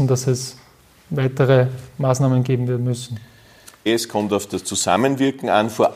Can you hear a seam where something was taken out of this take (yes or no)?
yes